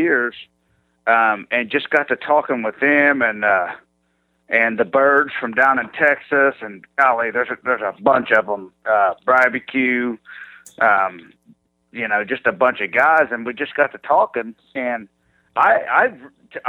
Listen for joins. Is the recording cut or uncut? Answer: uncut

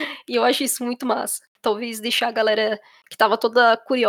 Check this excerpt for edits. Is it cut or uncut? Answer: cut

